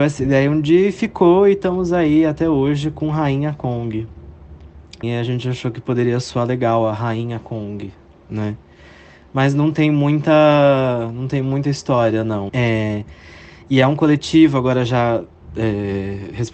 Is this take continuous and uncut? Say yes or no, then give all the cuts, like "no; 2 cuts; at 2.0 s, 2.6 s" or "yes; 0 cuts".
no; 2 cuts; at 5.0 s, 12.5 s